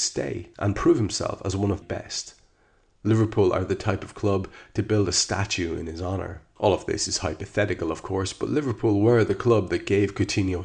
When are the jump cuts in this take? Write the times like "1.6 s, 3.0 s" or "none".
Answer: 1.8 s